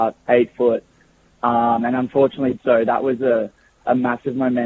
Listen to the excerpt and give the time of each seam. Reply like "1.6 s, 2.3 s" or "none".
1.3 s, 2.6 s